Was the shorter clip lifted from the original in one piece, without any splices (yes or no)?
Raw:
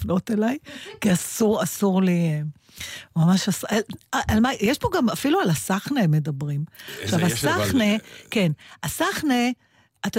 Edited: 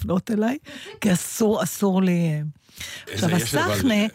no